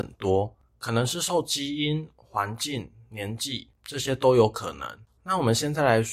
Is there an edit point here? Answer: yes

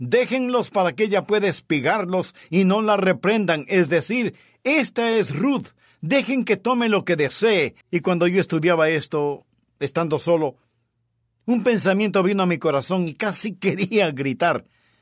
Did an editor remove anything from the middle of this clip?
yes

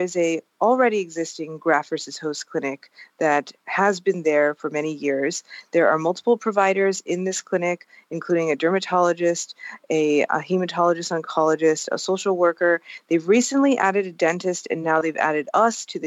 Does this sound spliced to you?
no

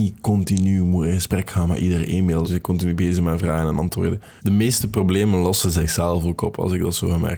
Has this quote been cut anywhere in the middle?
yes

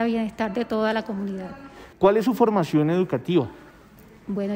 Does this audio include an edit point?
yes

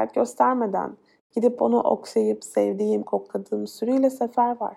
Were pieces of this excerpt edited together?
yes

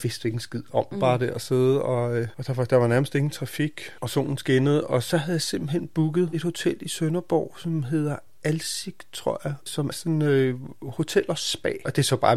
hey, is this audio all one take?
no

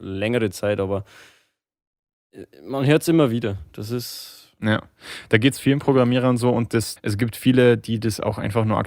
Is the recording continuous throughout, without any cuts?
no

